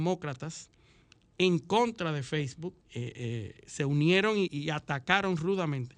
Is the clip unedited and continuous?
no; 2 cuts; at 2.8 s, 4.5 s

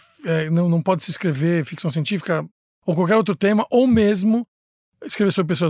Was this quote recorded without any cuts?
yes; 0 cuts

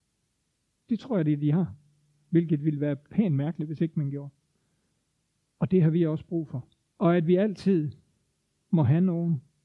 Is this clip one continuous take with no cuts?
no; 1 cut; at 6.9 s

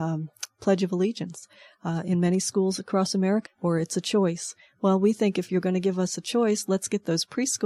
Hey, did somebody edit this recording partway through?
yes; 1 cut; at 3.5 s

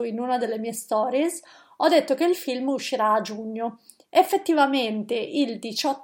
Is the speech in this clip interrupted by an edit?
no; 0 cuts

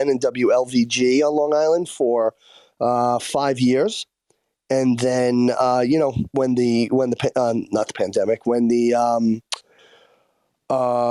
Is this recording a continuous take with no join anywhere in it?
yes; 0 cuts

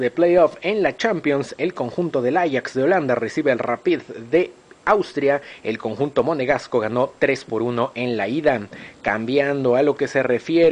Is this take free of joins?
no; 1 cut; at 5.6 s

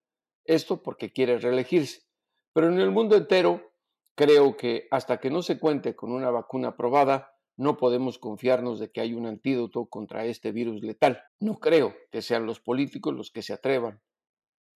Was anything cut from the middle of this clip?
yes; 1 cut; at 11.3 s

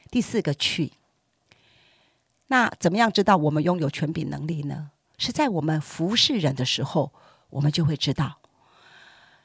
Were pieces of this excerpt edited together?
yes; 1 cut; at 5.1 s

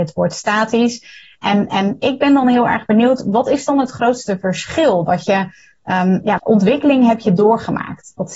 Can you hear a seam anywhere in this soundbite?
yes; 1 cut; at 6.4 s

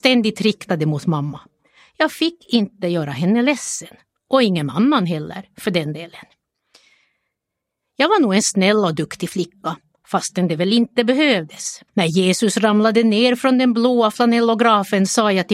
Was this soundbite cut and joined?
yes; 2 cuts; at 10.0 s, 11.9 s

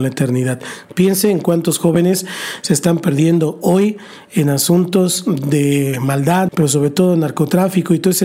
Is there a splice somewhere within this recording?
yes; 1 cut; at 6.5 s

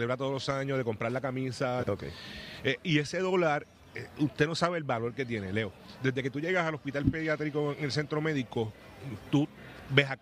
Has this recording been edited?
yes; 1 cut; at 1.8 s

